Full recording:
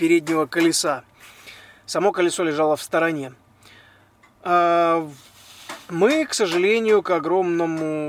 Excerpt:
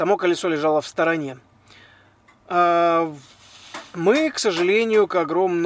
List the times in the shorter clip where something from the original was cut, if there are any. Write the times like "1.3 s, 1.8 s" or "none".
none